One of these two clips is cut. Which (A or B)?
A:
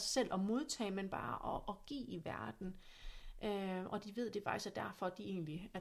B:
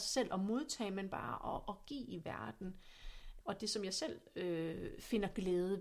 B